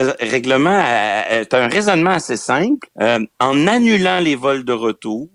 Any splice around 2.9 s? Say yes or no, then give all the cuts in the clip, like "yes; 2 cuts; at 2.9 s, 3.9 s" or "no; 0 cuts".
yes; 1 cut; at 2.9 s